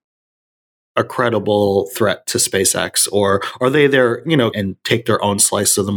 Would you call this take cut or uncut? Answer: cut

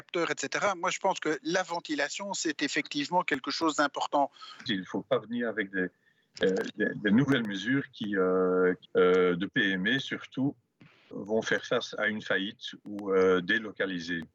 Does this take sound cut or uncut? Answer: cut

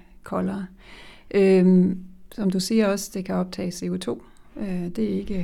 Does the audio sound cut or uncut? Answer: uncut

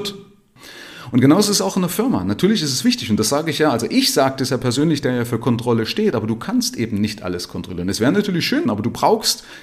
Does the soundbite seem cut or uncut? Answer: cut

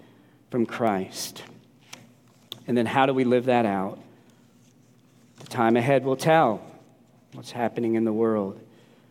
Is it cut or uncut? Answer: uncut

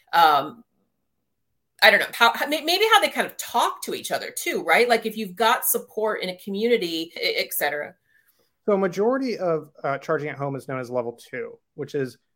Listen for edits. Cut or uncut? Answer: cut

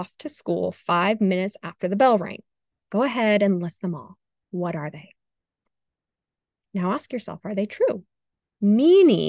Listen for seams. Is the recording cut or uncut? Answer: cut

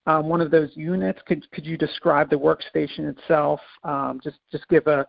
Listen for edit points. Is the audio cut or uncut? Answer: uncut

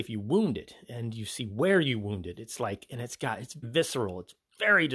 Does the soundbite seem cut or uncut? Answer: cut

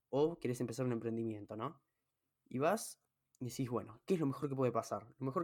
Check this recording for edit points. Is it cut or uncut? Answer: uncut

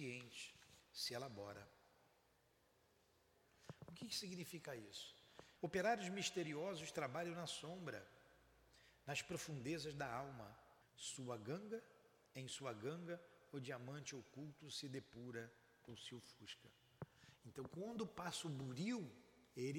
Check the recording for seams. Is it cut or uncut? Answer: cut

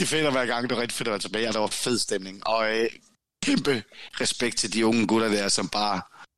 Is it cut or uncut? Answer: uncut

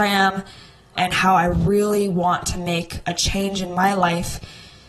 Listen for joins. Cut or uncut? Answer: cut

